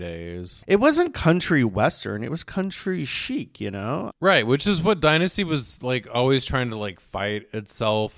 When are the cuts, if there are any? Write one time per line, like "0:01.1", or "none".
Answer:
0:04.1